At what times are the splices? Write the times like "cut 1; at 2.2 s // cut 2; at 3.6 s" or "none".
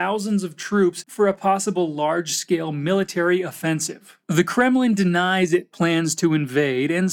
none